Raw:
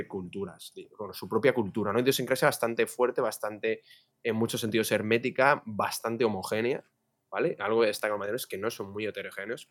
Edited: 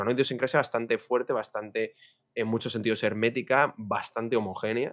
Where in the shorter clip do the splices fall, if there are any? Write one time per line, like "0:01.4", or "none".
none